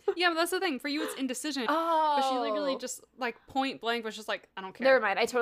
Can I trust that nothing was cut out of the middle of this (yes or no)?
no